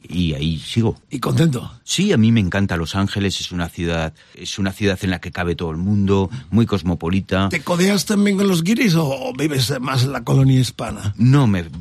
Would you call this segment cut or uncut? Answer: cut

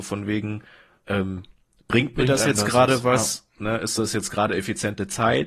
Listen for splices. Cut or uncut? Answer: uncut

